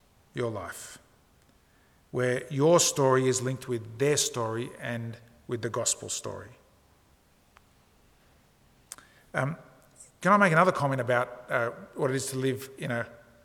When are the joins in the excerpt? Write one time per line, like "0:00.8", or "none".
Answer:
none